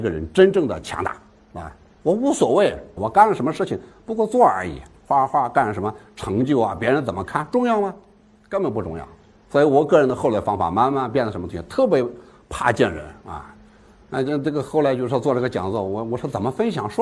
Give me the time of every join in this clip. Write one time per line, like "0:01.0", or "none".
0:03.0